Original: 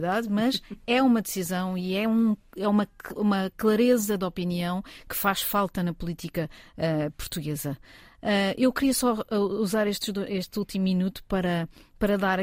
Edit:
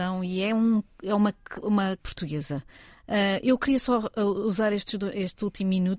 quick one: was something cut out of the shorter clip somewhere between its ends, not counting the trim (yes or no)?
yes